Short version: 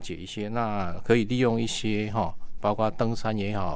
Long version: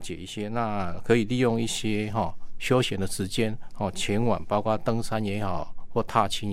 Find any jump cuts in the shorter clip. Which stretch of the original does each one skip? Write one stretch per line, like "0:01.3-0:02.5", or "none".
0:02.6-0:04.4